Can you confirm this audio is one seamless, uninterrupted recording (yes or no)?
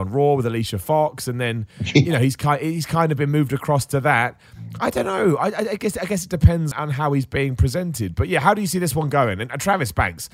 no